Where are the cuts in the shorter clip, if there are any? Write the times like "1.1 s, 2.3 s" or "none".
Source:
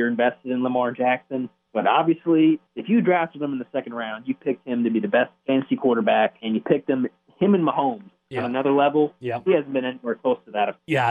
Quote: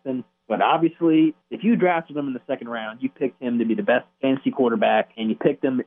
none